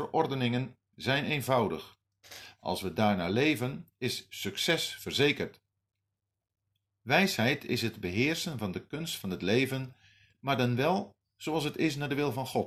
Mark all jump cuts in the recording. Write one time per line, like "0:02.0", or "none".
none